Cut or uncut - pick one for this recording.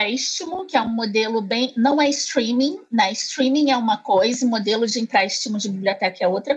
uncut